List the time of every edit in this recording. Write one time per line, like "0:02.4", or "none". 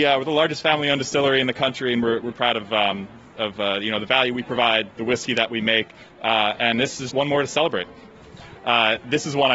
0:02.3
0:07.1
0:08.6